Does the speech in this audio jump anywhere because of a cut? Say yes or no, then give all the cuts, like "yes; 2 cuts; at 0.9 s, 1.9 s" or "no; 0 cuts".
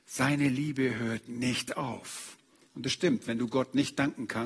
yes; 1 cut; at 2.7 s